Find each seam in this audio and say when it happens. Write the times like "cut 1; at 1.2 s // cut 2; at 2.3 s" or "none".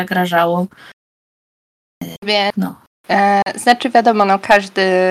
none